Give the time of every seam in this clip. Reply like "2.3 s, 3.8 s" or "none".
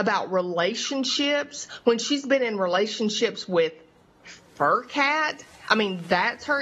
none